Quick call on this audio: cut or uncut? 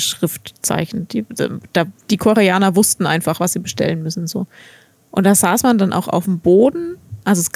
uncut